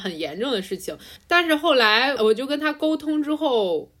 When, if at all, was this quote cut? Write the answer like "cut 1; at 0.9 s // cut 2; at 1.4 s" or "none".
none

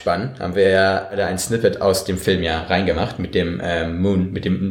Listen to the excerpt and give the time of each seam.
none

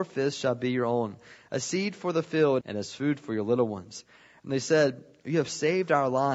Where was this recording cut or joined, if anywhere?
cut 1; at 2.6 s

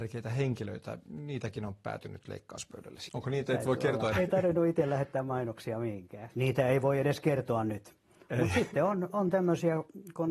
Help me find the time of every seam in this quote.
cut 1; at 3.1 s // cut 2; at 4.1 s // cut 3; at 6.3 s

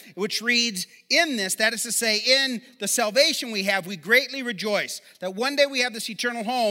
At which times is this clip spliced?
none

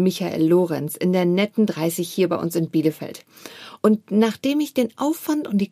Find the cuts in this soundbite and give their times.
none

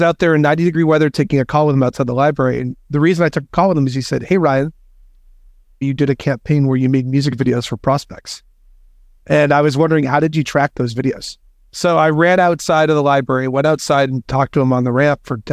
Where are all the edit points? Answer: cut 1; at 5.8 s // cut 2; at 11.7 s

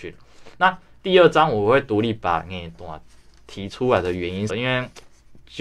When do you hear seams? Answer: cut 1; at 4.5 s

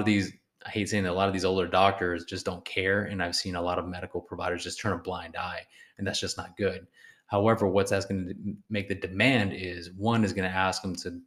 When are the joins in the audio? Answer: none

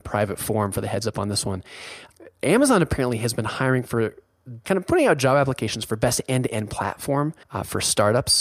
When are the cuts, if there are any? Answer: cut 1; at 7.4 s

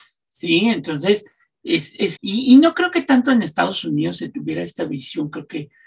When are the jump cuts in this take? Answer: cut 1; at 2.2 s

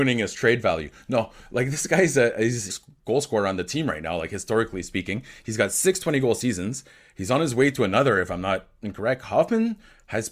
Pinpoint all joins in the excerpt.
cut 1; at 2.7 s

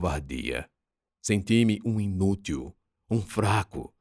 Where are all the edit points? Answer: cut 1; at 1.1 s

